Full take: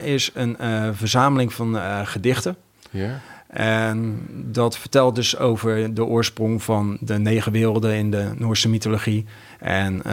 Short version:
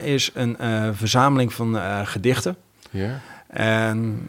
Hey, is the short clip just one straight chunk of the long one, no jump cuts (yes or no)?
yes